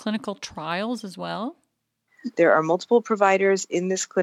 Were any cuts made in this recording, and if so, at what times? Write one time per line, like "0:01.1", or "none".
0:02.3